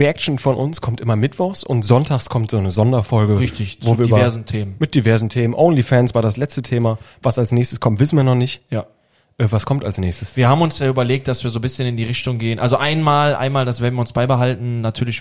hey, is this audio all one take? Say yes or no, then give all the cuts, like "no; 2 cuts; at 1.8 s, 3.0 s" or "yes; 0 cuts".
yes; 0 cuts